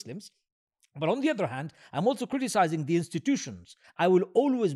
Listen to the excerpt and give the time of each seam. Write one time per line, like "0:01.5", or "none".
0:03.8